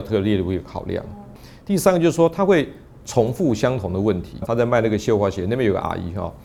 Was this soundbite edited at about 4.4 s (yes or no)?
yes